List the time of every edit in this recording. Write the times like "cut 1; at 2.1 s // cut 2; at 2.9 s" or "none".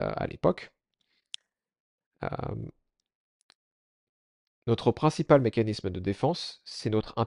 none

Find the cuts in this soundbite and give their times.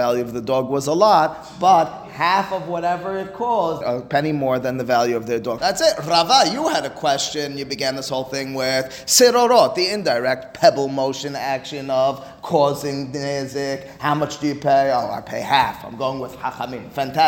cut 1; at 3.8 s // cut 2; at 5.6 s

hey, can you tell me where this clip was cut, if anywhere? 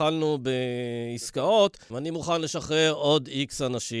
cut 1; at 1.9 s

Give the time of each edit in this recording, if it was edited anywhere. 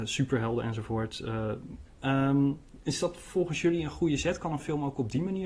cut 1; at 1.9 s

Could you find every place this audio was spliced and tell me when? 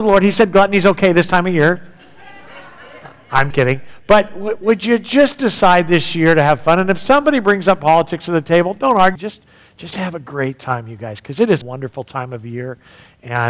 cut 1; at 3.5 s // cut 2; at 9.2 s // cut 3; at 11.6 s

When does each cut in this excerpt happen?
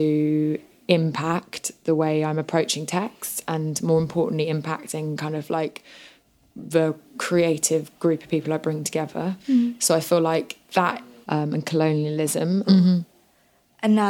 cut 1; at 11.2 s // cut 2; at 12.6 s

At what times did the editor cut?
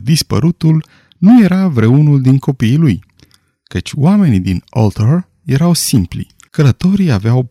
cut 1; at 6.5 s

